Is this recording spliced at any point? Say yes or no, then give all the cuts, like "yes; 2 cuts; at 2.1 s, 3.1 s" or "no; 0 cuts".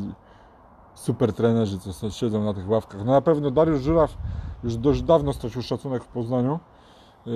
no; 0 cuts